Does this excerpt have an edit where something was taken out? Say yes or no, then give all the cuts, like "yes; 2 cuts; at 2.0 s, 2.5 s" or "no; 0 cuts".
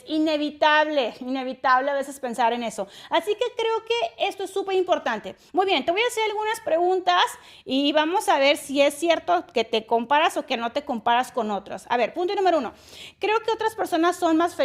no; 0 cuts